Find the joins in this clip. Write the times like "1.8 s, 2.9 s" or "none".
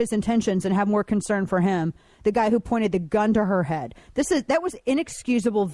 none